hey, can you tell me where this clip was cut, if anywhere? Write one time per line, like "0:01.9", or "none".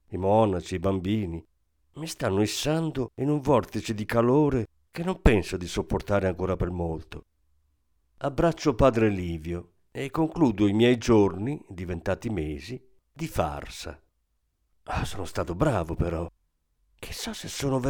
none